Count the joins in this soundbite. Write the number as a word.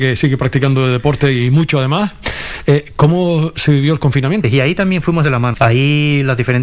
two